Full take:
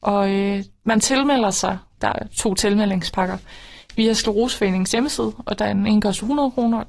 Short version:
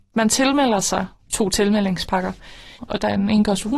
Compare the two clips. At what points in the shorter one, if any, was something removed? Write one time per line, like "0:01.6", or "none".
0:01.3
0:02.8